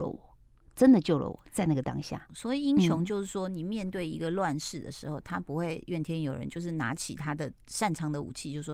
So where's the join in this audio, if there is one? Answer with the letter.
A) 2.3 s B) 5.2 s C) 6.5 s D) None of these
A